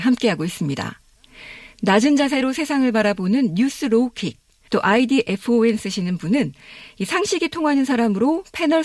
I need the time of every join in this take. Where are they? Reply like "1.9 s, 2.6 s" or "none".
4.7 s